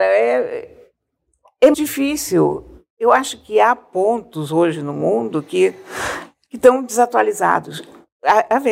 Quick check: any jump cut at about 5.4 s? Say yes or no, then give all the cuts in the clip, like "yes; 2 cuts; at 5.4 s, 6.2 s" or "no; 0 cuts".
no; 1 cut; at 1.7 s